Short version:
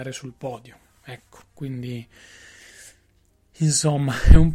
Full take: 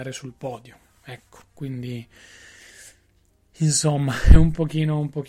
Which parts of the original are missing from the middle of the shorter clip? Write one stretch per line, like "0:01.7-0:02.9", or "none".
none